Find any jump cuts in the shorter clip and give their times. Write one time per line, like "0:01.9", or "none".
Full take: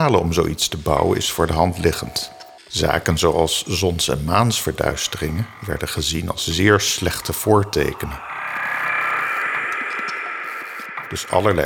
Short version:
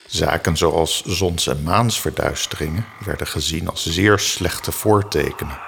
none